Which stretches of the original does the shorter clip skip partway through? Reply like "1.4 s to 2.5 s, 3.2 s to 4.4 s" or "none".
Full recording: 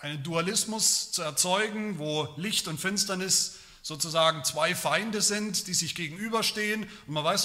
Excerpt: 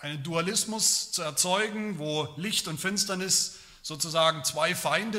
none